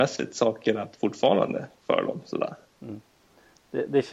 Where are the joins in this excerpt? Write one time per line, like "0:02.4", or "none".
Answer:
none